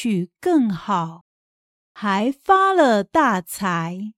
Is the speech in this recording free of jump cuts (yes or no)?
yes